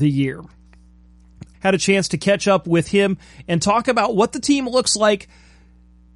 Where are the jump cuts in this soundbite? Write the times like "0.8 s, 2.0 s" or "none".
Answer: 1.5 s